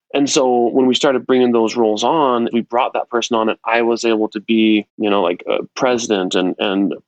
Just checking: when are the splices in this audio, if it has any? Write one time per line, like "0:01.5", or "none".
0:02.5
0:04.9